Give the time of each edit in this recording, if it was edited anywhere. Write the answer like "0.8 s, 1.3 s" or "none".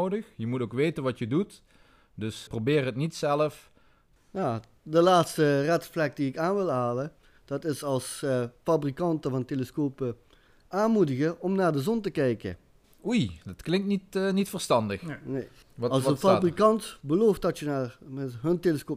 2.5 s, 4.2 s